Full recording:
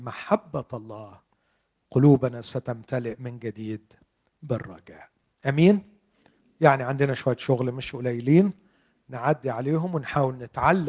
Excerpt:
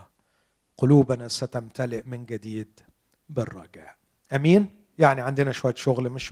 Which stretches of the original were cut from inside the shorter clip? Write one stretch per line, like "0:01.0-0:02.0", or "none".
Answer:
0:06.0-0:06.5